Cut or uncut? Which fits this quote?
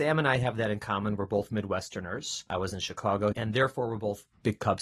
cut